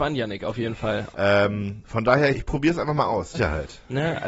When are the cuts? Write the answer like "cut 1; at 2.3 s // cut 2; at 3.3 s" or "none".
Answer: cut 1; at 1.1 s // cut 2; at 2.3 s // cut 3; at 3.3 s